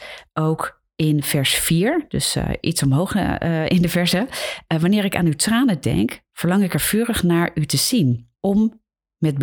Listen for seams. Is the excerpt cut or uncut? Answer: cut